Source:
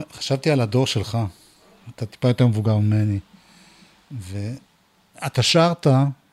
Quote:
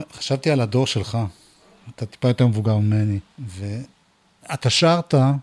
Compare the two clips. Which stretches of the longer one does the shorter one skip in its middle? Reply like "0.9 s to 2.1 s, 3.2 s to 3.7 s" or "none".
3.3 s to 4.0 s